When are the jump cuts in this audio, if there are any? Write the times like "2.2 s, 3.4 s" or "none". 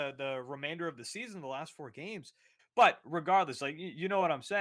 2.6 s